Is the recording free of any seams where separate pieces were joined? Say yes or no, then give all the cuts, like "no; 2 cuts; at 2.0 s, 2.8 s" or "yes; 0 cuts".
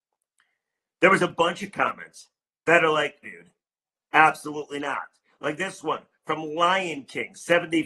no; 1 cut; at 3.2 s